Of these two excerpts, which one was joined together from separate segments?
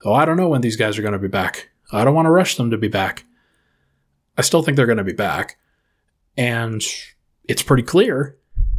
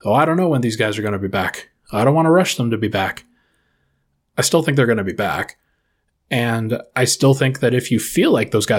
first; 1 cut; at 6.2 s

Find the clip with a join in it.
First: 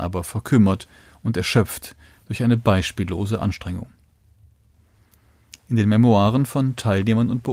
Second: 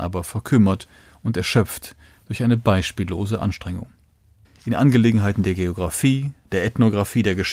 second; 1 cut; at 4.4 s

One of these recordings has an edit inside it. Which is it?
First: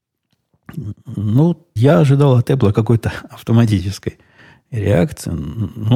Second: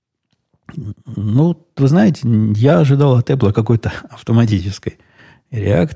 first; 1 cut; at 1.8 s

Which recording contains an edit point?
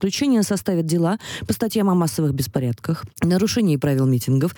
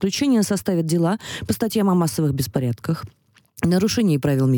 first; 1 cut; at 3.1 s

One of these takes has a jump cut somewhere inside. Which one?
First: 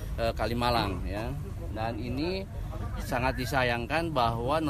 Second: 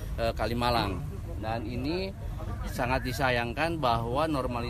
second; 1 cut; at 1.0 s

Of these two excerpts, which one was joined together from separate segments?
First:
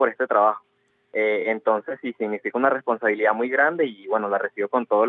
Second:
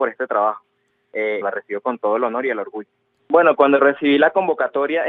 second; 2 cuts; at 1.4 s, 3.2 s

